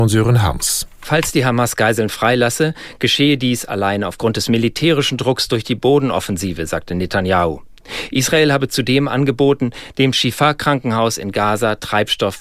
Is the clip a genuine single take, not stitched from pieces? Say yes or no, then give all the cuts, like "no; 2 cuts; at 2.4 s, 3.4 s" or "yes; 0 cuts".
yes; 0 cuts